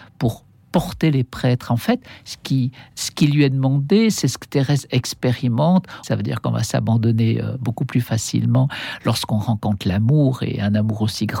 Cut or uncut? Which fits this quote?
cut